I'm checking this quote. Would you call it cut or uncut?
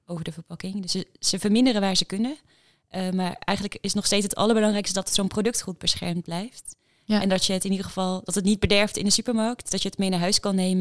uncut